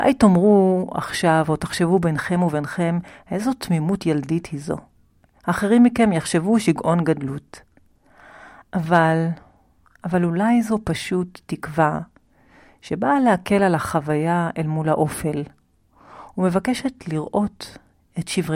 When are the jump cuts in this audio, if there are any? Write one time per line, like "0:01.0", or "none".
none